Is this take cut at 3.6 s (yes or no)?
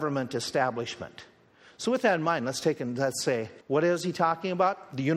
yes